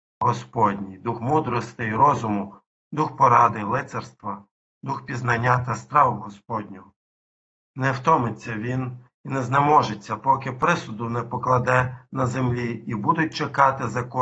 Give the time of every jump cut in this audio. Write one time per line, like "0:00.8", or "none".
0:07.5